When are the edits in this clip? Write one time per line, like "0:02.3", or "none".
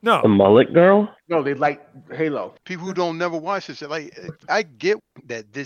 0:01.2
0:02.6

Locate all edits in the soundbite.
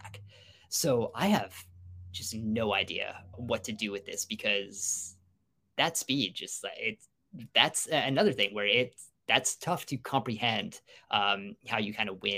0:03.3

